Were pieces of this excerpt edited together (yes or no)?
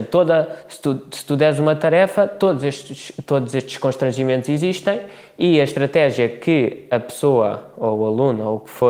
no